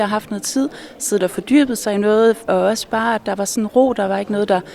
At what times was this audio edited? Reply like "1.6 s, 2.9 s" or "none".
2.5 s